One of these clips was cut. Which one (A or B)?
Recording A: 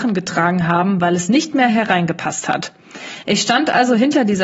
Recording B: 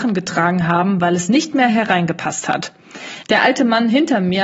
B